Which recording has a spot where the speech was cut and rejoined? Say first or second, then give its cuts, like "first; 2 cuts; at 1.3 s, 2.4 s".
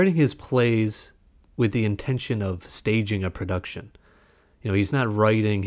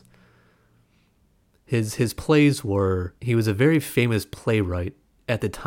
second; 1 cut; at 3.2 s